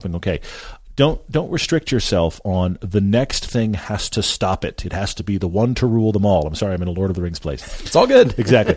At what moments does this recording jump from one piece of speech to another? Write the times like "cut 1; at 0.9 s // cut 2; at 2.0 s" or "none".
none